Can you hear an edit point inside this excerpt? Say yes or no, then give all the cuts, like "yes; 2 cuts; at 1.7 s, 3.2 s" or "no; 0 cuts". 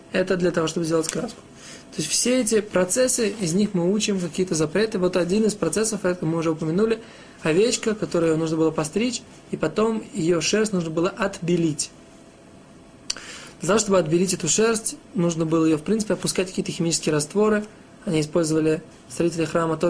no; 0 cuts